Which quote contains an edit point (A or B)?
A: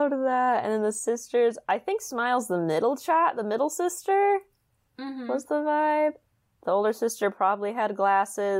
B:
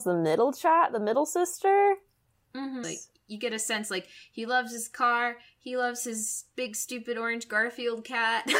B